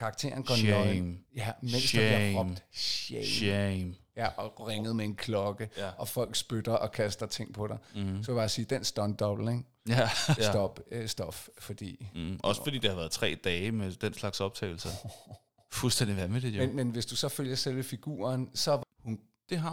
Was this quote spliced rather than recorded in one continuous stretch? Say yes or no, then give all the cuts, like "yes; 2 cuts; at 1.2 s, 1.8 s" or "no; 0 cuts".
yes; 2 cuts; at 10.4 s, 18.8 s